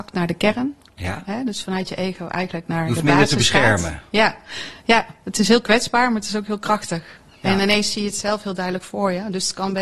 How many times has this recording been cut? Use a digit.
0